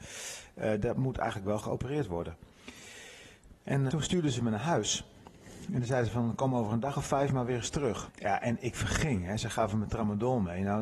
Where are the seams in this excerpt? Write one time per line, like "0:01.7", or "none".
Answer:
0:03.9
0:08.1